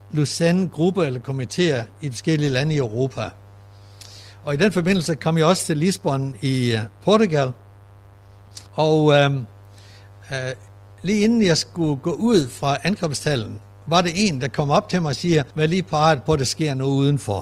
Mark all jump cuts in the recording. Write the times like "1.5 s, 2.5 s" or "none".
8.7 s, 15.5 s